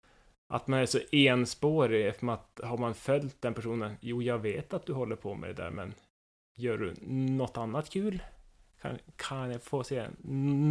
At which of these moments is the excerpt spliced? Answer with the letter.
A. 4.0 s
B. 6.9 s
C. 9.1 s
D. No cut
C